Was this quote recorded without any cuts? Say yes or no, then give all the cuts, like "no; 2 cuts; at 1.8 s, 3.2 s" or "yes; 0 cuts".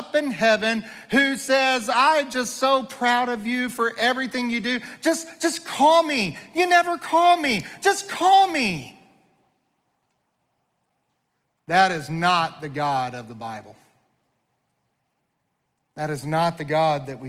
yes; 0 cuts